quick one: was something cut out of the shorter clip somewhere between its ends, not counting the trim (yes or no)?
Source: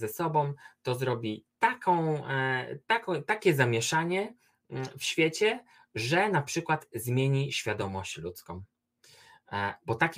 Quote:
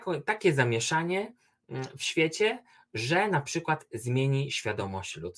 no